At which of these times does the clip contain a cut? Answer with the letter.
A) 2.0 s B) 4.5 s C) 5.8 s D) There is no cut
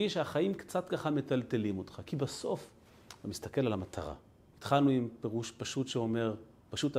B